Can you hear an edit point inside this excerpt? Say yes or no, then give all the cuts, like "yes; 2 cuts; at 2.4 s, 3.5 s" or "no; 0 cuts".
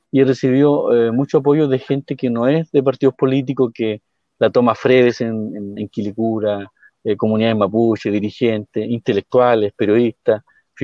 no; 0 cuts